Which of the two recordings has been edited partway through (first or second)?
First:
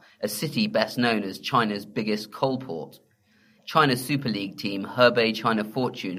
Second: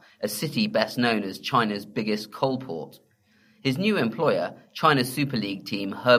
first